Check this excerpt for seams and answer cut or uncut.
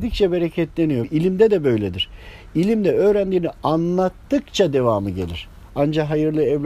cut